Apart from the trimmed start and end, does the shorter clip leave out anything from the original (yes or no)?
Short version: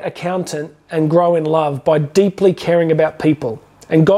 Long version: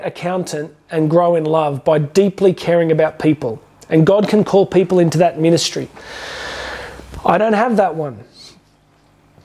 no